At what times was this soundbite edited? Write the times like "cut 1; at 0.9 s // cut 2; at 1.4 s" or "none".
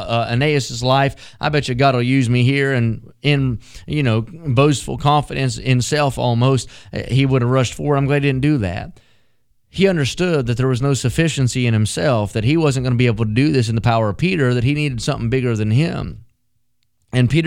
none